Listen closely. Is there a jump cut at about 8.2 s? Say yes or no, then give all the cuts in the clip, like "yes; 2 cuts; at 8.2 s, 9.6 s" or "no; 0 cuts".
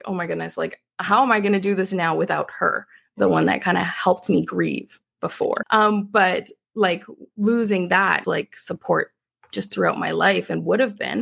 yes; 2 cuts; at 5.6 s, 8.2 s